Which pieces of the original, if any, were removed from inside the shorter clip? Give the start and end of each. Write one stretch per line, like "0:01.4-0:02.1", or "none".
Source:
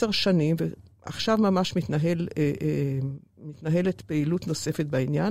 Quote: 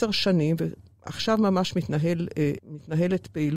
0:02.6-0:03.3